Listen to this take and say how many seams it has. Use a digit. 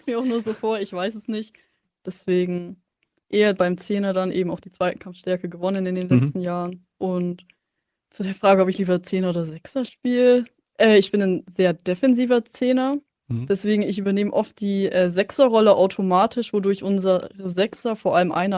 0